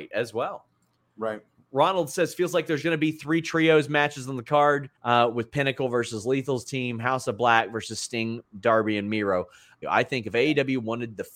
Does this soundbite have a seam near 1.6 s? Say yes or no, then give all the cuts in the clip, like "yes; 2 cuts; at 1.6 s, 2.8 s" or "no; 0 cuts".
no; 2 cuts; at 5.0 s, 9.8 s